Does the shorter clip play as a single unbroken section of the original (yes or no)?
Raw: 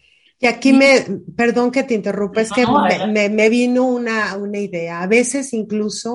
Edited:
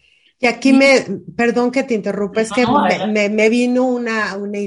yes